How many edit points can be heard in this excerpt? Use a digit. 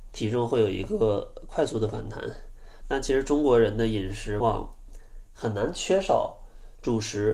2